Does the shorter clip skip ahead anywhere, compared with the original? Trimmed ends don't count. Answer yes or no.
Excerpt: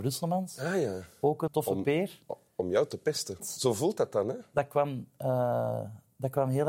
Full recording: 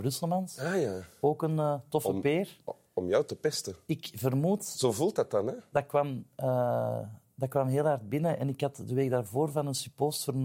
yes